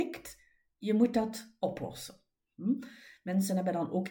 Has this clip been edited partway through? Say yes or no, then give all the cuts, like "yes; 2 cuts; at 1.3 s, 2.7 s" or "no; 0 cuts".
no; 0 cuts